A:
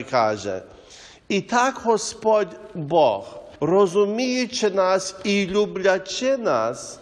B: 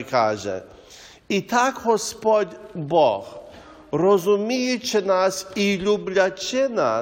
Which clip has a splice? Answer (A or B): A